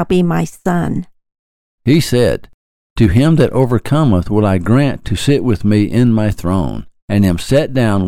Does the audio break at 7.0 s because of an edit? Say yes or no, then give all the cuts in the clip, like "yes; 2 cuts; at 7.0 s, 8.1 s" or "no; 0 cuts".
yes; 2 cuts; at 1.8 s, 7.0 s